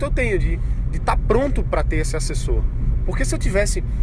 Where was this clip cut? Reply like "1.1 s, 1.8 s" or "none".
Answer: none